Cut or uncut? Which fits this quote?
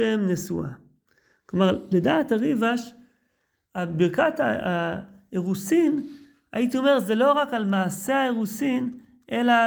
uncut